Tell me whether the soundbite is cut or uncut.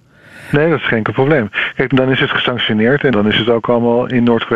cut